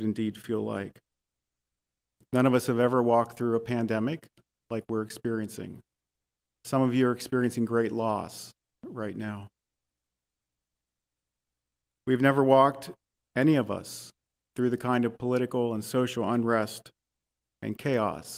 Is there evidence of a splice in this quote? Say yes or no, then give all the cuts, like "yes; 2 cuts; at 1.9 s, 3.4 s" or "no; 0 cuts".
no; 0 cuts